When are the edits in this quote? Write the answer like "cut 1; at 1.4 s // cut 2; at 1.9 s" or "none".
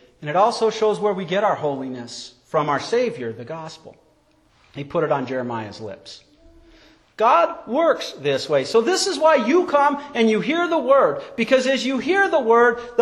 none